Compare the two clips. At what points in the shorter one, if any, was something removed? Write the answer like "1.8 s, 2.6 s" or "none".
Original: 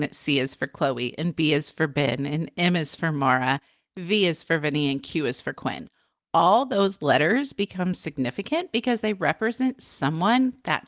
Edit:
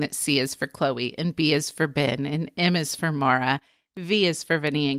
none